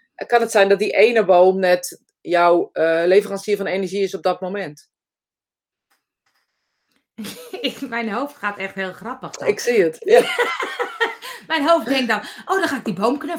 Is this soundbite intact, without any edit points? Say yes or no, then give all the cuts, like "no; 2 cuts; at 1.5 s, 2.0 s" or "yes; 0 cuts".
yes; 0 cuts